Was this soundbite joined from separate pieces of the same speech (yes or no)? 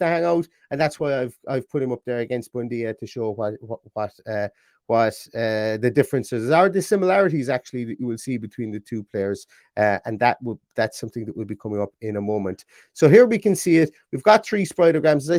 no